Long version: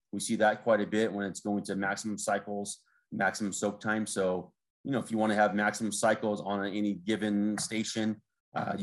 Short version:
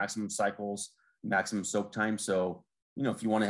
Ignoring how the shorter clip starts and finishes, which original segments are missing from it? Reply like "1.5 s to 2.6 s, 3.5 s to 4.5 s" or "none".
none

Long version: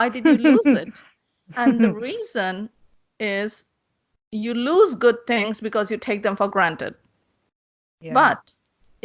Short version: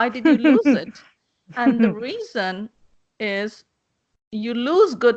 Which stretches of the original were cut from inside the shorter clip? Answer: none

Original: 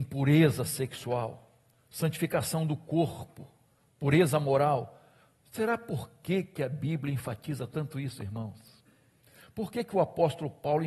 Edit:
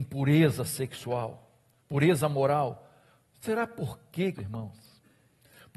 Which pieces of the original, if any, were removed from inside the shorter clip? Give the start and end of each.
1.8 s to 3.9 s, 6.5 s to 8.2 s

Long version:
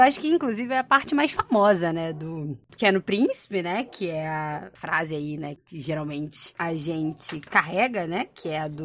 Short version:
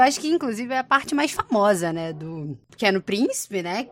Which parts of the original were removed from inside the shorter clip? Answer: none

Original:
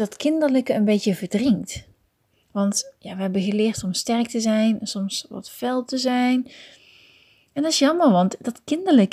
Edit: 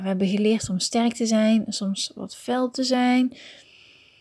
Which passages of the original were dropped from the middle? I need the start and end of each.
none

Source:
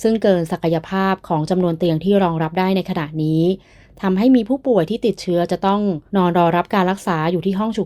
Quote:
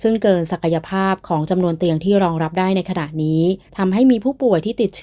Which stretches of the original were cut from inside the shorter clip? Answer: 3.7 s to 3.9 s

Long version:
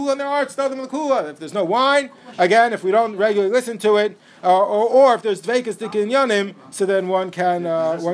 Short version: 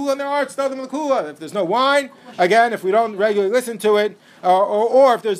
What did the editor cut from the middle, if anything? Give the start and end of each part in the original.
none

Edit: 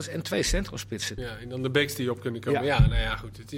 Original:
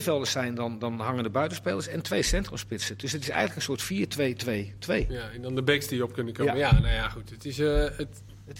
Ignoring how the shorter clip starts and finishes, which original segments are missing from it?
3.0 s to 5.1 s

